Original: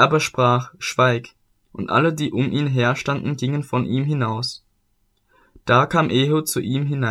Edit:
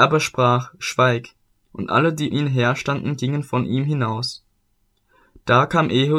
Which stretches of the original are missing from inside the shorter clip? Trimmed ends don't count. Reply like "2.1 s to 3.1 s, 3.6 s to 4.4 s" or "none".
2.3 s to 2.5 s